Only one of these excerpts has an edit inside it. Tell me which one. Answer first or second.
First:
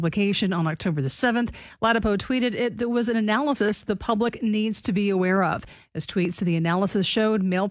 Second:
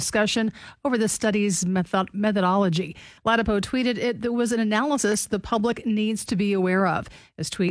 second